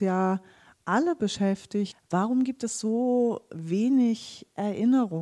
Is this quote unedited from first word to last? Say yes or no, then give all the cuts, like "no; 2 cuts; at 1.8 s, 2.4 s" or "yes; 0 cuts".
yes; 0 cuts